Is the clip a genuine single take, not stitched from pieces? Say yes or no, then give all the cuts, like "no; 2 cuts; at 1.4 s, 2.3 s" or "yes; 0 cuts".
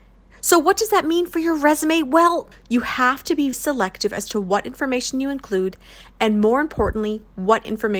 no; 2 cuts; at 2.5 s, 3.5 s